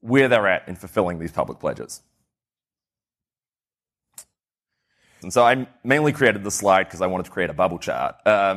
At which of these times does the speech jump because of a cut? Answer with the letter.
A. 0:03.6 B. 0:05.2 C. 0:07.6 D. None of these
B